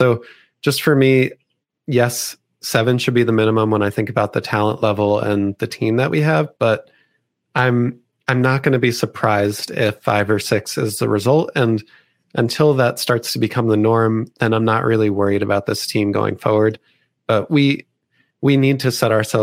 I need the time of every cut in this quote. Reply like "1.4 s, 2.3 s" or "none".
none